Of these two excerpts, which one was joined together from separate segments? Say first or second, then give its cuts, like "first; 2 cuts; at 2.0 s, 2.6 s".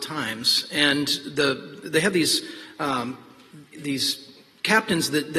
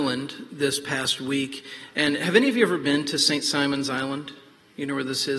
first; 1 cut; at 3.7 s